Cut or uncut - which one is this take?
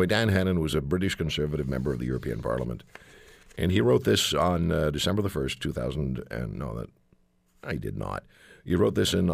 uncut